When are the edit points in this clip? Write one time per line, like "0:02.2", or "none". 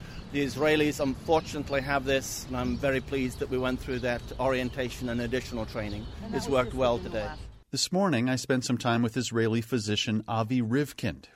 0:07.6